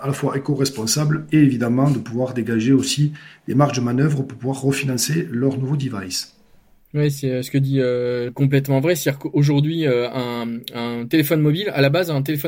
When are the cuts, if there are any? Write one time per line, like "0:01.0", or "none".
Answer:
0:08.3